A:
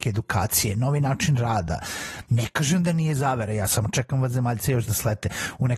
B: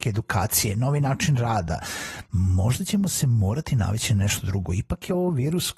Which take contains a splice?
A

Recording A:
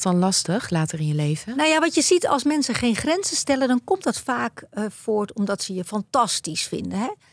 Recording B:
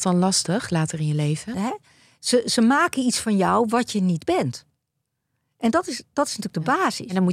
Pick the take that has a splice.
B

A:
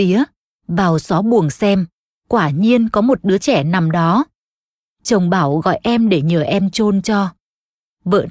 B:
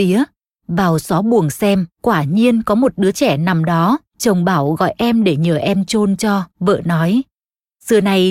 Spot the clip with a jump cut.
B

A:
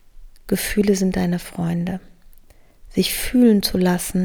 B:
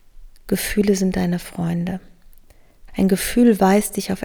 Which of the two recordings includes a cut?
B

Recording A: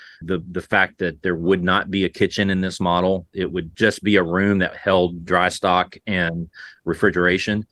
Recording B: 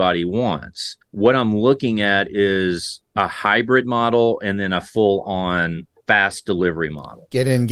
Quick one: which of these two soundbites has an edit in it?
B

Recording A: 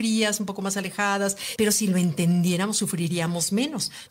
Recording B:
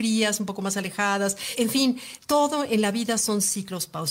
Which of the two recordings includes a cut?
A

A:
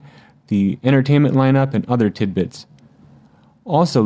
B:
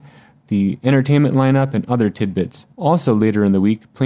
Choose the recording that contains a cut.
B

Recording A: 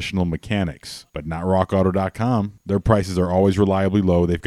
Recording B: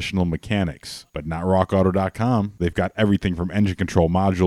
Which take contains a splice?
B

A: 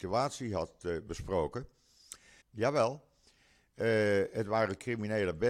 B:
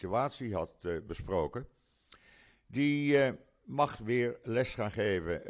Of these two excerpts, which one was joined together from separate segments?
A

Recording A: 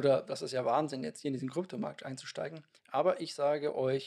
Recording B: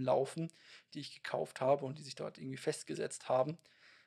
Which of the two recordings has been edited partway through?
A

